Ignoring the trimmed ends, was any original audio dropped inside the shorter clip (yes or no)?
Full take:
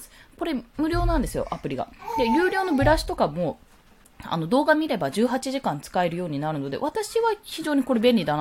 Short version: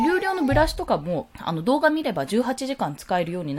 yes